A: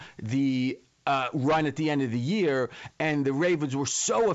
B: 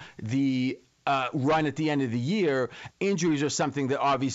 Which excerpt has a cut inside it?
B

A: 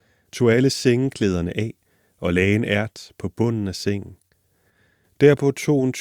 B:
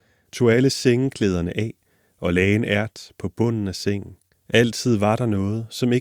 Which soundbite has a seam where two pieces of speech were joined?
B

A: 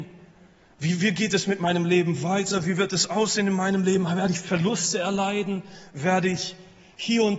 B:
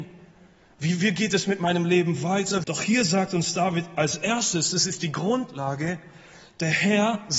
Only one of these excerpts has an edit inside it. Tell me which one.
B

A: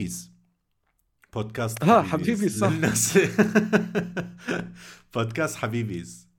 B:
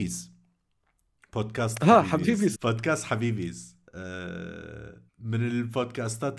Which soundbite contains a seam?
B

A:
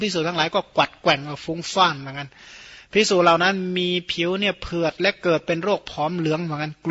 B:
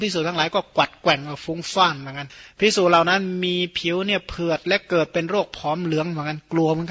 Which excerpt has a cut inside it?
B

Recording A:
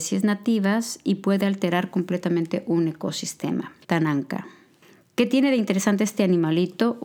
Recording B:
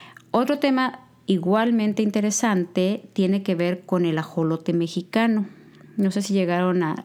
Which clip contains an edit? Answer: A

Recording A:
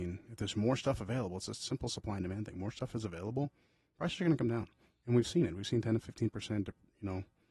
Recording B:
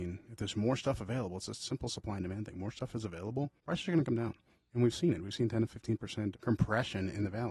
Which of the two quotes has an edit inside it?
B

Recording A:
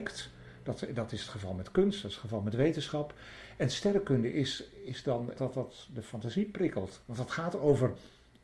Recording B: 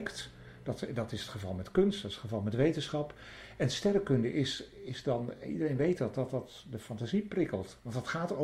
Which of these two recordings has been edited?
A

